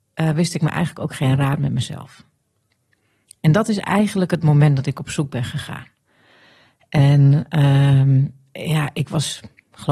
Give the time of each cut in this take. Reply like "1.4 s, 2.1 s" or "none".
none